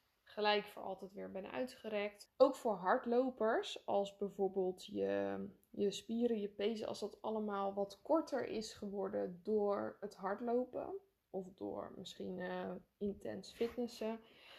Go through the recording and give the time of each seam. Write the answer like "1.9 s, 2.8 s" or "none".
2.3 s